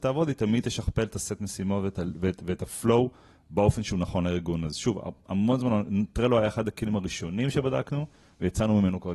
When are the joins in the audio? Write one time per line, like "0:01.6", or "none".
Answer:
none